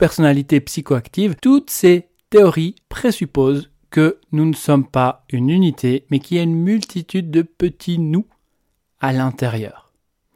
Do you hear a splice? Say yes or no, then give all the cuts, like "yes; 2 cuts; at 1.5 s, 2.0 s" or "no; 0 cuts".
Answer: yes; 2 cuts; at 1.4 s, 2.8 s